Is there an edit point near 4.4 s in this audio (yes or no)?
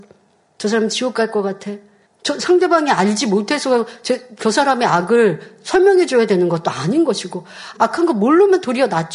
no